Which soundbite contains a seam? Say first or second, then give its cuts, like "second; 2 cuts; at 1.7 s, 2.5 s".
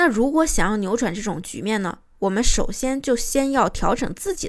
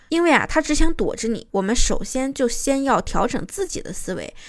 second; 1 cut; at 1.5 s